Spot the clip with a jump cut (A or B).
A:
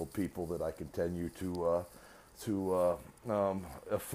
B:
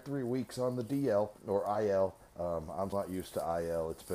B